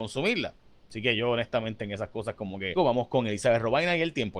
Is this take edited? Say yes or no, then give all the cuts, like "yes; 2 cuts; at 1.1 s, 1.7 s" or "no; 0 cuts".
yes; 1 cut; at 2.7 s